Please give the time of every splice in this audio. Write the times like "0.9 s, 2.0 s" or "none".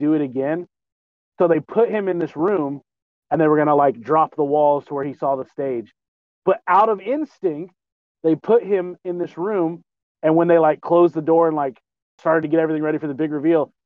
8.1 s

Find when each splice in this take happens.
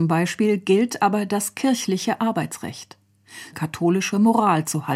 3.5 s

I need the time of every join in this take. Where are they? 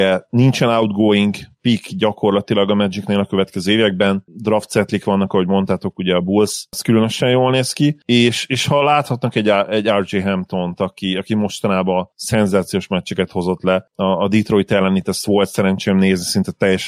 4.3 s

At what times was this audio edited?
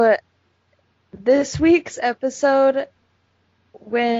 none

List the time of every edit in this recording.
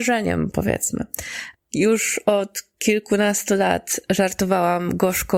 1.5 s

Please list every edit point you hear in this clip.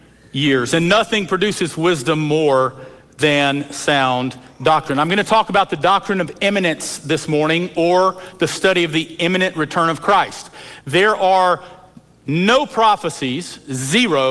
none

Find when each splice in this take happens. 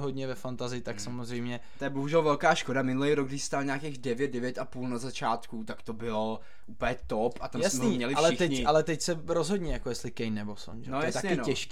none

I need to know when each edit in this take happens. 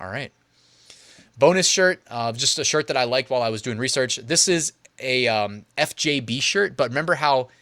none

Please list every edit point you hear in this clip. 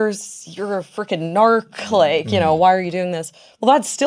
none

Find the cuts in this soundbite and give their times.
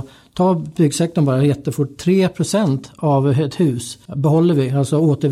4.1 s

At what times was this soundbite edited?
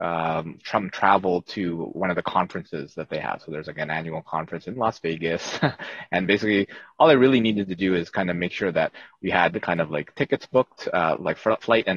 none

